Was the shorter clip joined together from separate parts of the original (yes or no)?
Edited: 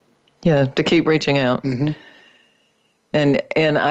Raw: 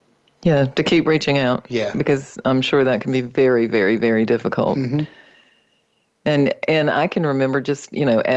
yes